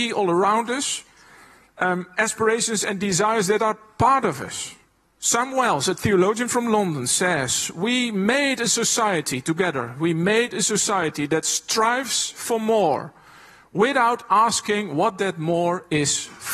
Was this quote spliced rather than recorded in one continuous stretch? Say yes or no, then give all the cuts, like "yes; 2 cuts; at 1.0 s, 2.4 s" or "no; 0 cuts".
yes; 1 cut; at 5.0 s